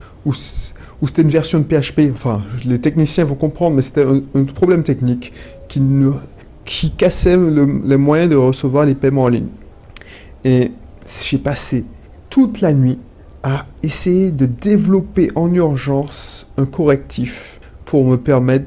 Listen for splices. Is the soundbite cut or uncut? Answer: uncut